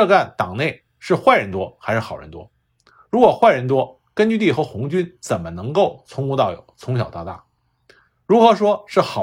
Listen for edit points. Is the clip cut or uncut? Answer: uncut